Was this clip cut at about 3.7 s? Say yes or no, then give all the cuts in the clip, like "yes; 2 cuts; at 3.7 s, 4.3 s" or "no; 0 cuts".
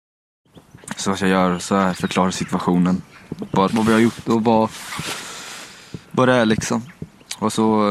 yes; 1 cut; at 3.7 s